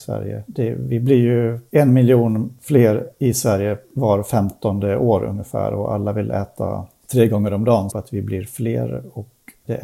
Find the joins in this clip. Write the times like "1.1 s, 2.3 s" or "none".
7.9 s